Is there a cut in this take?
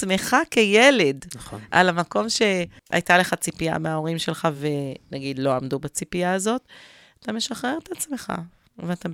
no; 0 cuts

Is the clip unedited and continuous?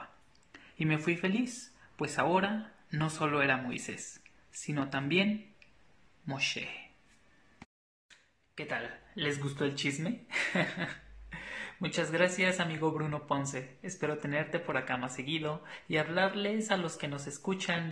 yes; 0 cuts

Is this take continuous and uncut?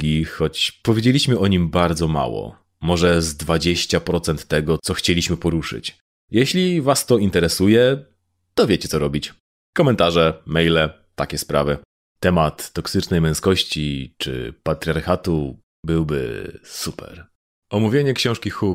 yes; 0 cuts

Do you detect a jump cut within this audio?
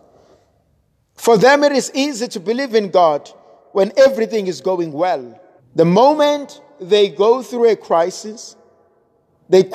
yes; 1 cut; at 5.6 s

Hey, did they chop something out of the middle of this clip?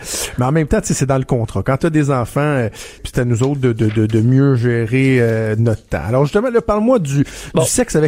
yes; 1 cut; at 3.0 s

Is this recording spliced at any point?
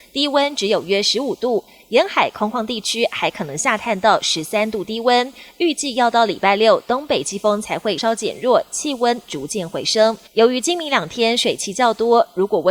yes; 2 cuts; at 8.0 s, 10.3 s

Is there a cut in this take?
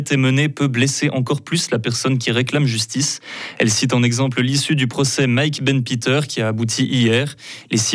no; 0 cuts

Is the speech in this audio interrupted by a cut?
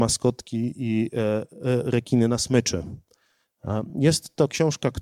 no; 0 cuts

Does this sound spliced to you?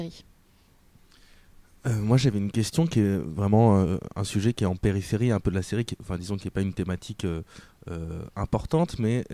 no; 0 cuts

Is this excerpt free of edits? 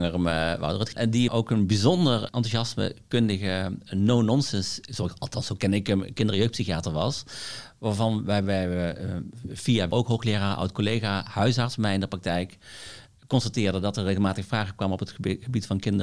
yes; 0 cuts

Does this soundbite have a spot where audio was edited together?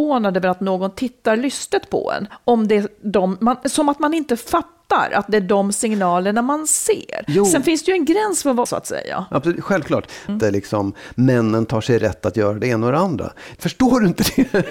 yes; 3 cuts; at 8.7 s, 10.3 s, 13.6 s

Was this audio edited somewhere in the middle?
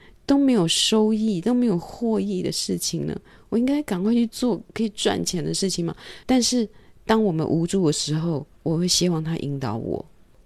yes; 2 cuts; at 6.2 s, 8.5 s

